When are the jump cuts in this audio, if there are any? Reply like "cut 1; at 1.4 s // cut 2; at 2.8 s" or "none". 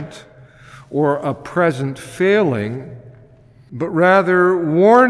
none